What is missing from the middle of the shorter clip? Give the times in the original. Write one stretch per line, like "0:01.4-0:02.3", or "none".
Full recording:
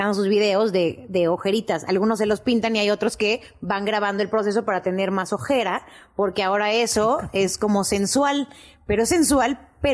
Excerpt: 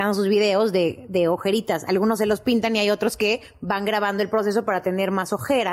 none